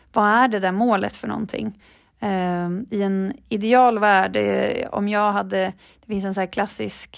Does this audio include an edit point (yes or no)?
no